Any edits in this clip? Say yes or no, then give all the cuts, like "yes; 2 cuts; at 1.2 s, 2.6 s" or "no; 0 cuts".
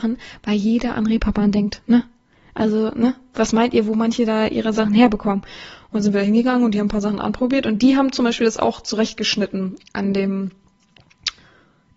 no; 0 cuts